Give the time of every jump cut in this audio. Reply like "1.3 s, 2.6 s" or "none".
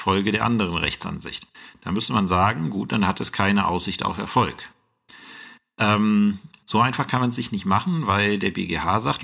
none